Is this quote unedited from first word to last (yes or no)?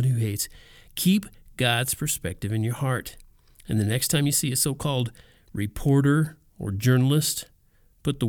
yes